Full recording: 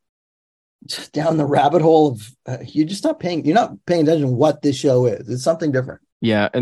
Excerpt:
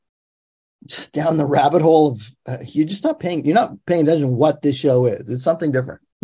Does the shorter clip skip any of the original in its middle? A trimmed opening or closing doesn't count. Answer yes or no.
no